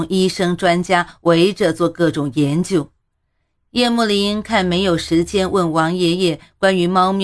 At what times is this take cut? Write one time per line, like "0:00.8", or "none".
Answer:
none